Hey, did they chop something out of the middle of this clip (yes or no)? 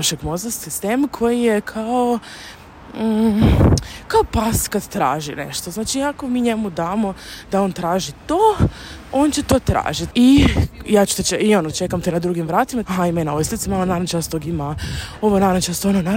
yes